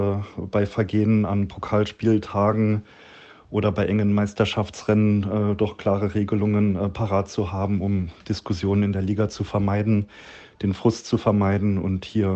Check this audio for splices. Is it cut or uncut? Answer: uncut